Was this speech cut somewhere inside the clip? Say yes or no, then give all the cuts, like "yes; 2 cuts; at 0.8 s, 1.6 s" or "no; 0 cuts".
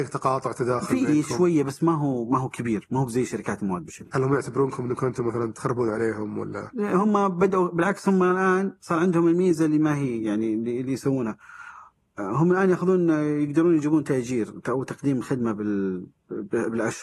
no; 0 cuts